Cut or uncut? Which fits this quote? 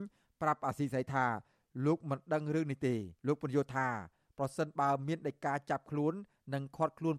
cut